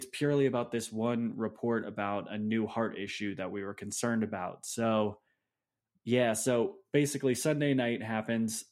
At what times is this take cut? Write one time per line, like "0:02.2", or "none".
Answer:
none